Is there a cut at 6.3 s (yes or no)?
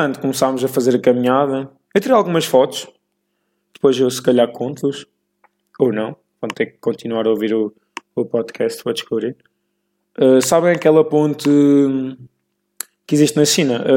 no